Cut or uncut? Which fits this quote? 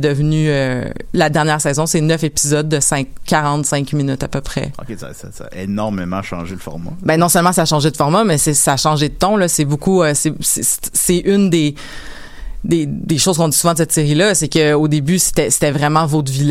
uncut